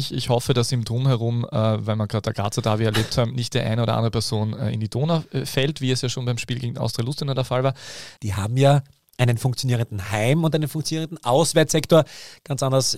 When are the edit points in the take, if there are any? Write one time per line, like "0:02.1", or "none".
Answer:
0:08.2